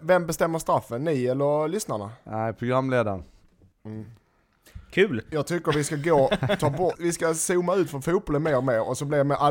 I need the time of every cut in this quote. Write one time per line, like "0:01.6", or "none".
0:03.7
0:05.3
0:06.9